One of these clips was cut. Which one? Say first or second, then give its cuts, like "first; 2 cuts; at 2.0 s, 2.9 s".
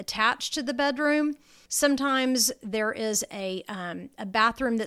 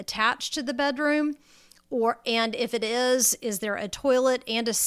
first; 1 cut; at 1.7 s